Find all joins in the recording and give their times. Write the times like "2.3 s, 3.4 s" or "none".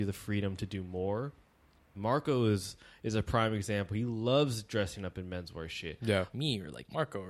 1.9 s, 6.3 s